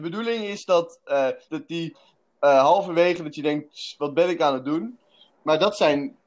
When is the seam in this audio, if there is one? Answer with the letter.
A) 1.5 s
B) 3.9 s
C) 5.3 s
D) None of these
A